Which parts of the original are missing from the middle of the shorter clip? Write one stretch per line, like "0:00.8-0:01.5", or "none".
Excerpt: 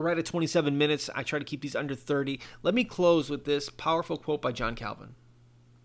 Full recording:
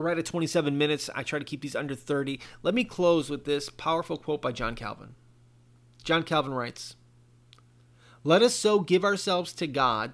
none

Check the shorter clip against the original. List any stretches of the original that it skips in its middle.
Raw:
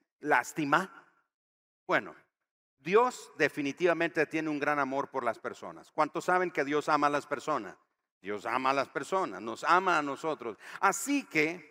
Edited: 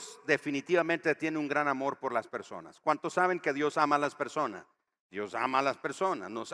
none

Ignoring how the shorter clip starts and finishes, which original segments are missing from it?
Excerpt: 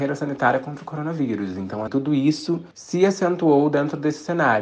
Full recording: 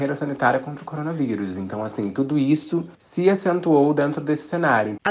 0:01.9-0:02.1

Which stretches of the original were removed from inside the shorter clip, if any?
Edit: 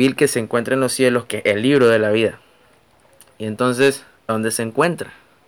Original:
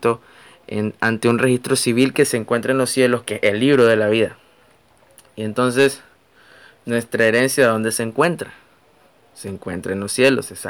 0:06.3-0:07.7

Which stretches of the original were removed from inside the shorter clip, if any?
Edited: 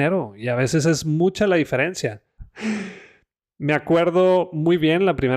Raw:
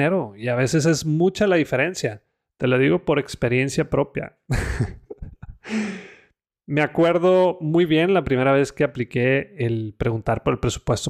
0:02.4-0:05.5

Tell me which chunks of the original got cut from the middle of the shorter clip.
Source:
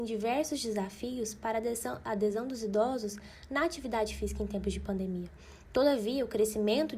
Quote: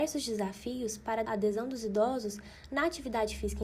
0:01.6-0:02.0

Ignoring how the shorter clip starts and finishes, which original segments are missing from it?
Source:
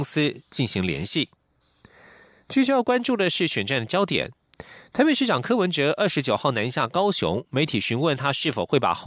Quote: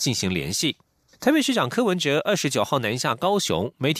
0:01.7-0:04.9

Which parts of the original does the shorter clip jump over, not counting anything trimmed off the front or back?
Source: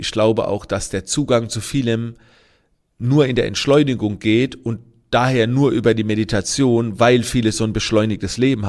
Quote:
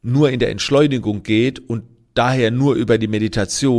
none

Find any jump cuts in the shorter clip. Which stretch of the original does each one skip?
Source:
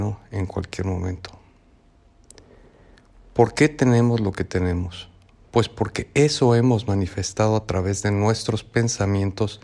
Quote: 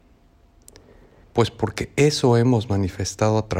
0:02.9-0:05.4

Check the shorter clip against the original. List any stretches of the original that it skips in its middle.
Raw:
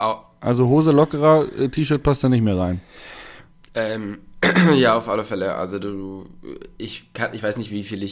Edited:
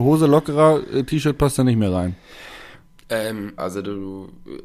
0:04.2-0:05.6

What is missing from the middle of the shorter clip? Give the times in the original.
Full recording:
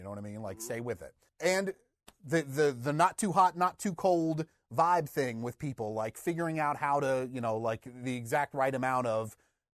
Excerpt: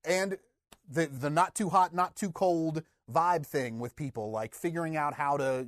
0:02.5-0:02.8

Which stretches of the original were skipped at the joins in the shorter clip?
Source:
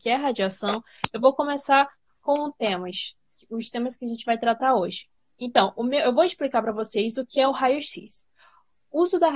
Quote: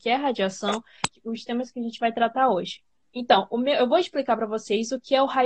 0:01.1-0:03.3

